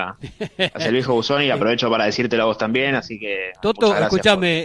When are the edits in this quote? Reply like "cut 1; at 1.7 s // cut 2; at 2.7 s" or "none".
none